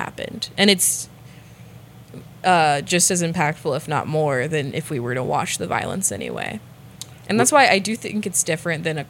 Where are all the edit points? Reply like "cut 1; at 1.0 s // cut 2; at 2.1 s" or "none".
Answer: none